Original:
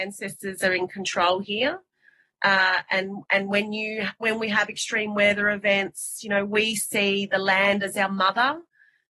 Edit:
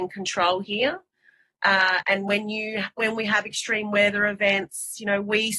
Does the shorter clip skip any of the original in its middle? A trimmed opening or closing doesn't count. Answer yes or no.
yes